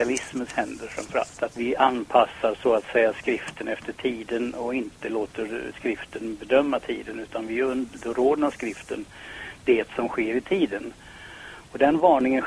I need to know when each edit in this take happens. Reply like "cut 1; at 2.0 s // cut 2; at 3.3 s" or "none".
cut 1; at 1.5 s